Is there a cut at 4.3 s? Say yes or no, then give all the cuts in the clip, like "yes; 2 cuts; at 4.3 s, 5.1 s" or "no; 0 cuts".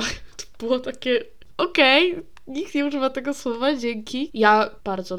yes; 1 cut; at 4.3 s